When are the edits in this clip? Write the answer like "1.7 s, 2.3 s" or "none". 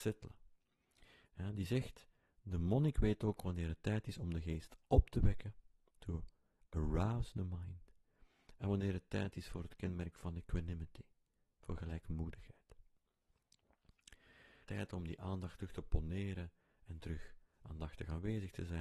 1.3 s, 14.6 s

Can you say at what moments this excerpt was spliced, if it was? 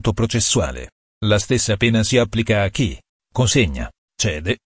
1.1 s, 3.2 s

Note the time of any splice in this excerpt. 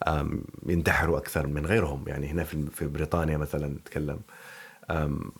1.5 s

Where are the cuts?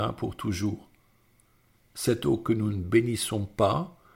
none

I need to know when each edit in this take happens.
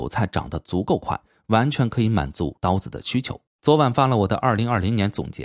3.5 s

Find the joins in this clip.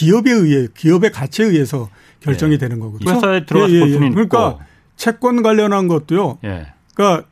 3.1 s

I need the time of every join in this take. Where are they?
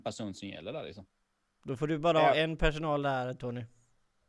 none

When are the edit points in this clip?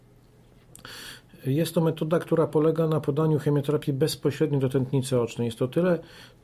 none

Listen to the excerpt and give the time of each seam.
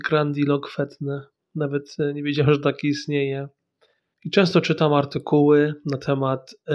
4.1 s

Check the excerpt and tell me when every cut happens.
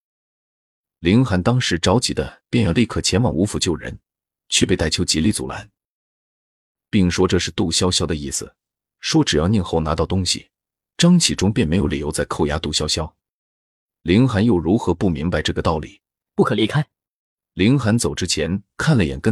14.0 s, 16.3 s

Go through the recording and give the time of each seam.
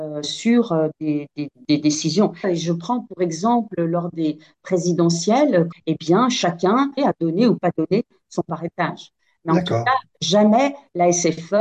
2.4 s, 5.7 s, 7.0 s

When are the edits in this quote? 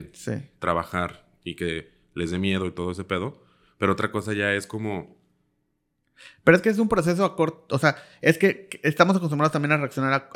none

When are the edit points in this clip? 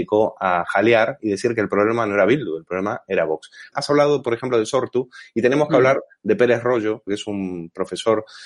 3.7 s, 7.1 s

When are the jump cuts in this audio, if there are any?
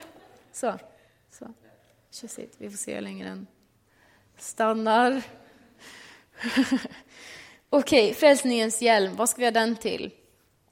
none

